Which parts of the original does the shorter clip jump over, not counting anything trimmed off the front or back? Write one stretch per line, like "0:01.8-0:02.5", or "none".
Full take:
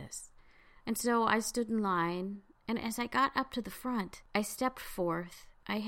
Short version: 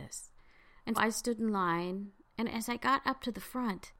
0:00.9-0:01.2